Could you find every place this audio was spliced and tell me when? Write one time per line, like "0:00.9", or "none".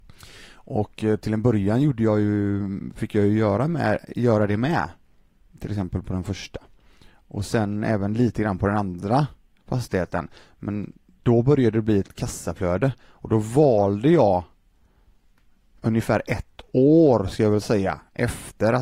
none